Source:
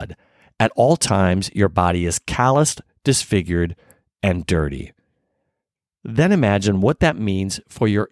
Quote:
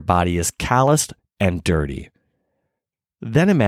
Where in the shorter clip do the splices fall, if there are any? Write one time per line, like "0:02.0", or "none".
0:01.2

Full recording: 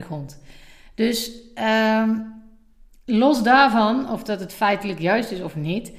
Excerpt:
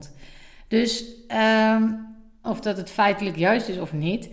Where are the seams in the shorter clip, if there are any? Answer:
0:02.4

